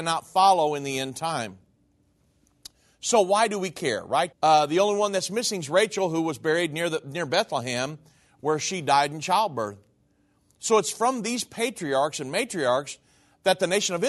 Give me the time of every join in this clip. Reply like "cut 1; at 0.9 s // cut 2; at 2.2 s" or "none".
cut 1; at 4.3 s